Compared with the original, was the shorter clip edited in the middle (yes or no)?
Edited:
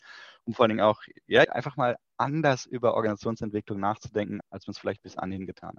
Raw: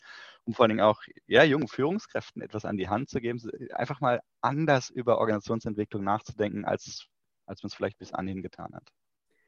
yes